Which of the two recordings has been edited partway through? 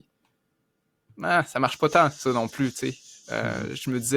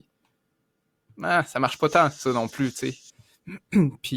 second; 1 cut; at 3.1 s

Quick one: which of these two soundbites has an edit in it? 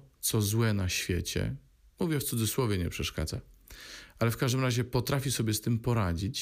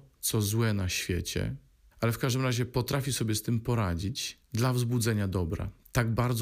second; 1 cut; at 1.9 s

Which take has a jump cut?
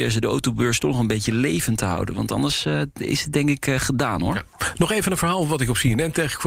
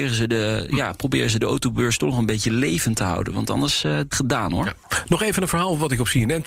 second; 1 cut; at 4.1 s

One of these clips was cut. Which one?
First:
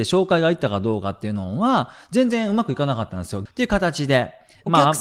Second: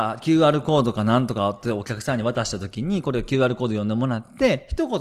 first; 1 cut; at 3.5 s

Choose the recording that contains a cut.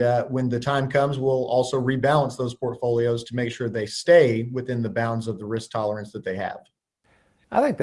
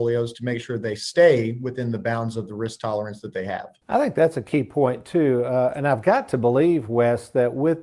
second; 1 cut; at 3.8 s

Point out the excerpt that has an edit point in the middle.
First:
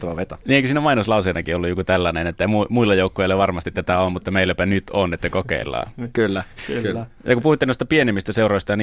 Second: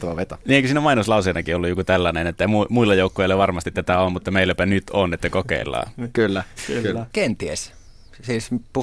second; 1 cut; at 7.1 s

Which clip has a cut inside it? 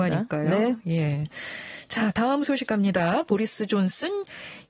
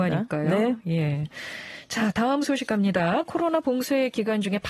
first; 1 cut; at 3.2 s

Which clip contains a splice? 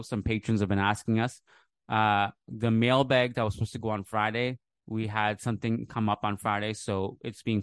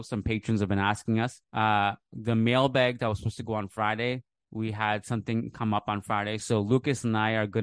second; 2 cuts; at 1.4 s, 6.4 s

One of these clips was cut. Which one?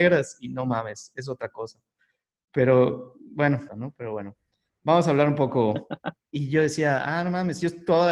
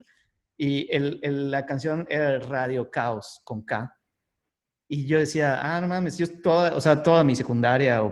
first; 2 cuts; at 3.7 s, 6.2 s

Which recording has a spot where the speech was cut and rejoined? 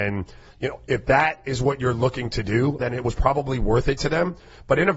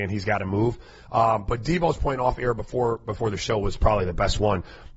first; 1 cut; at 2.8 s

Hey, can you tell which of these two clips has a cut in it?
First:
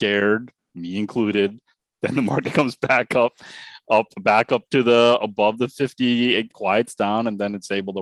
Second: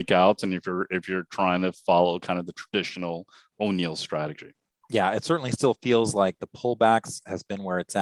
first; 1 cut; at 6.5 s

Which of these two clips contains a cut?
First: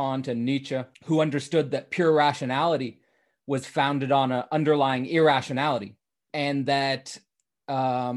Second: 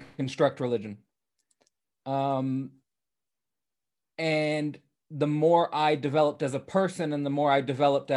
first; 2 cuts; at 0.9 s, 6.3 s

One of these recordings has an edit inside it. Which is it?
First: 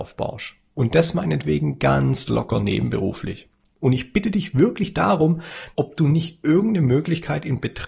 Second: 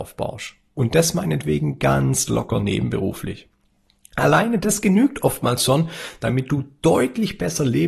first; 2 cuts; at 3.7 s, 5.7 s

